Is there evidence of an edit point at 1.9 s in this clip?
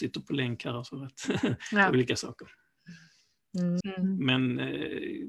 no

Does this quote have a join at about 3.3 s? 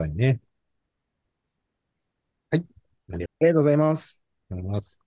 yes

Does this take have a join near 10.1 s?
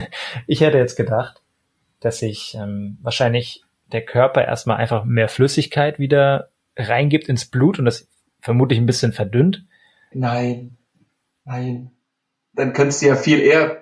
yes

